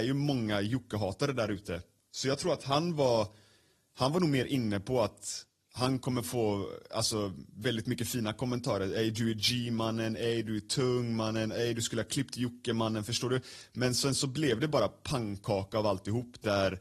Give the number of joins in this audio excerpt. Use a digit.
0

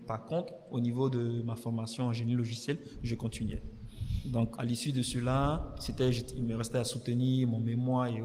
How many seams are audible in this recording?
1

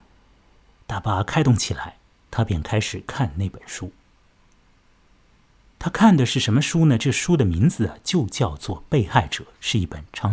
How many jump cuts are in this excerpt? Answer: 0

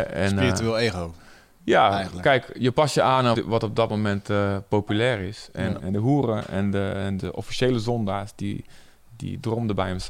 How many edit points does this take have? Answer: 3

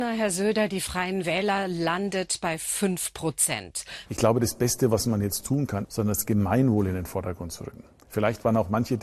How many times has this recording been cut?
2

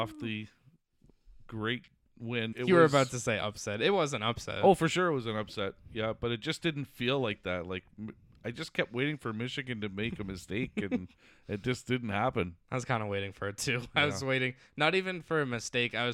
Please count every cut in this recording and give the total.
1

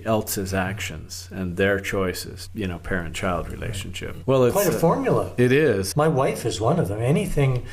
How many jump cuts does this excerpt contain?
3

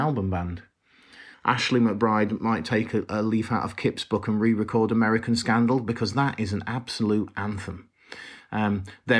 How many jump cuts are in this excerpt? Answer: 1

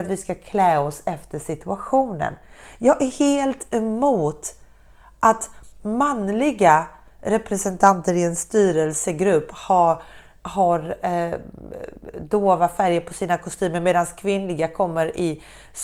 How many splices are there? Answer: 0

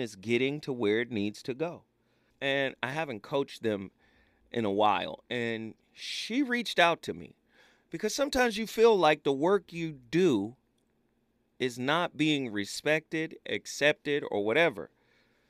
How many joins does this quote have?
1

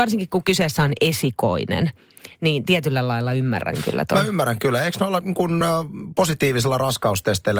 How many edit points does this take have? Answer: 0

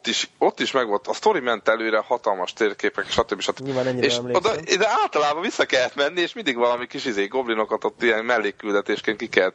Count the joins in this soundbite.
1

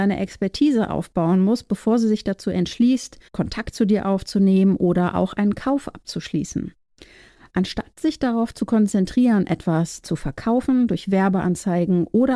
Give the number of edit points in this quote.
1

